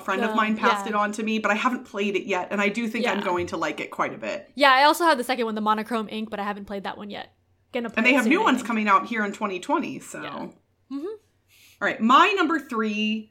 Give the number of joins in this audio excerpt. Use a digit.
0